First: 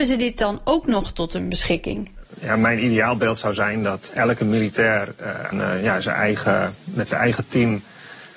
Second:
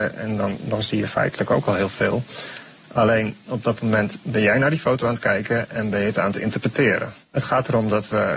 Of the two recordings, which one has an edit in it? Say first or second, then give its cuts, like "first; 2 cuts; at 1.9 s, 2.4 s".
first; 2 cuts; at 4.1 s, 5.5 s